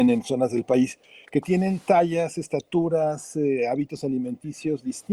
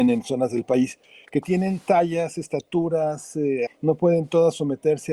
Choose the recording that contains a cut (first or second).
second